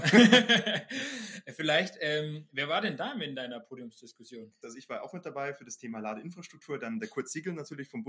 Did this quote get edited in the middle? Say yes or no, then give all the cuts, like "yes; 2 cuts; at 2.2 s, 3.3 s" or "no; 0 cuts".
yes; 1 cut; at 4.6 s